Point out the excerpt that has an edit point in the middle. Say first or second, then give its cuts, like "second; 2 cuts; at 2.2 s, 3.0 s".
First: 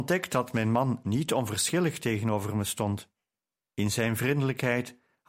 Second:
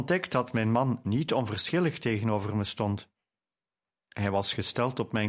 first; 1 cut; at 3.6 s